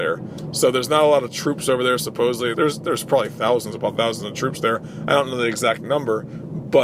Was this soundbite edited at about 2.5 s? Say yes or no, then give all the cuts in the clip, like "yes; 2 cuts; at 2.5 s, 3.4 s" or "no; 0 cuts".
yes; 1 cut; at 2.5 s